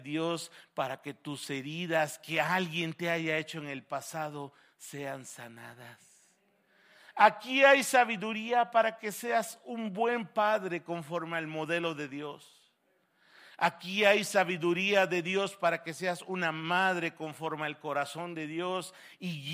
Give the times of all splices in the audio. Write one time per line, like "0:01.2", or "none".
none

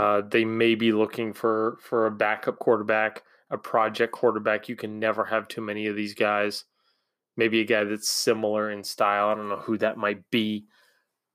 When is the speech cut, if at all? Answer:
none

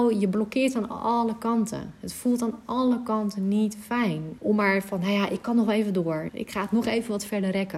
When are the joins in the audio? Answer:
0:04.4
0:06.3

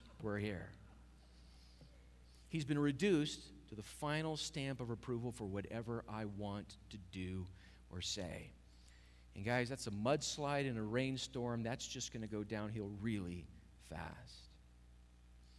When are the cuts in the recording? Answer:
0:13.0

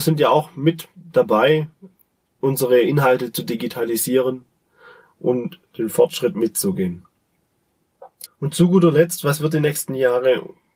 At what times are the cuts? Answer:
0:08.3

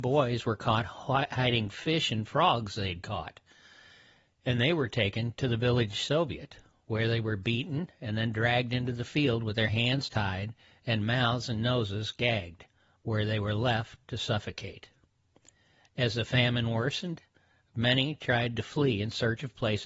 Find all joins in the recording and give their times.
none

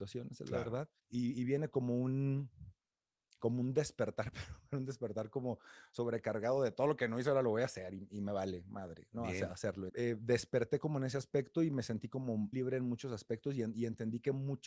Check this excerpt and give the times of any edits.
0:01.0
0:09.9
0:12.5

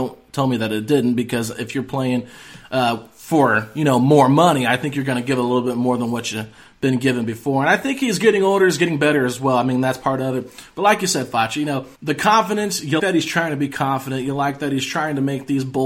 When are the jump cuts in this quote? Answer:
0:12.0
0:13.0

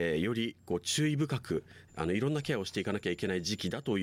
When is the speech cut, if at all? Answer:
0:01.9

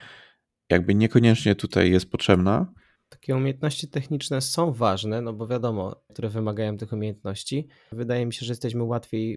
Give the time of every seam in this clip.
0:03.0
0:06.1
0:07.9

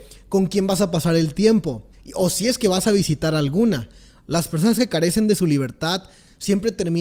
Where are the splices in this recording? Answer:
0:01.9
0:04.1

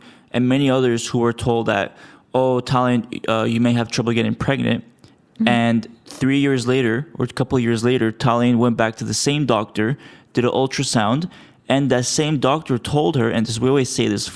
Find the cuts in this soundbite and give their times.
none

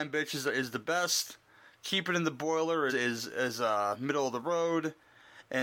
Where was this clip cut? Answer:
0:02.9

